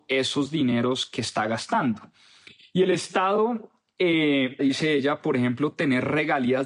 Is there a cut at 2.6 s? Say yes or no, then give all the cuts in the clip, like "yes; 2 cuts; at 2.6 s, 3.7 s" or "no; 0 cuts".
no; 1 cut; at 4.6 s